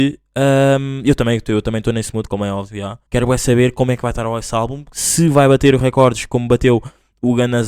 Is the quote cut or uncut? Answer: cut